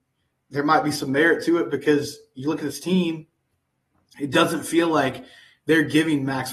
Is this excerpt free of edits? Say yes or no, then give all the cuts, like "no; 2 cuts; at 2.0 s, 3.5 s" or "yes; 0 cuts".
yes; 0 cuts